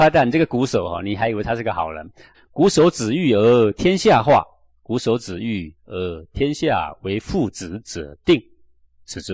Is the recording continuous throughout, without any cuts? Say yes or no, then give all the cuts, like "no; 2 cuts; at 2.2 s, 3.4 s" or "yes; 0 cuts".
no; 1 cut; at 2.3 s